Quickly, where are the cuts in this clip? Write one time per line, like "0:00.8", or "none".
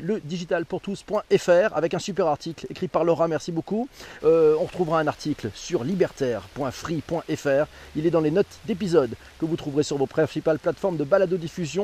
0:04.2